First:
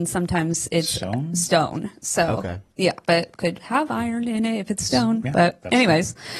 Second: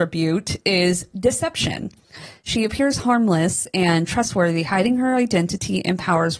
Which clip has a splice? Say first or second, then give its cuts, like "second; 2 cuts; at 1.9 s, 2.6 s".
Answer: first; 1 cut; at 3.1 s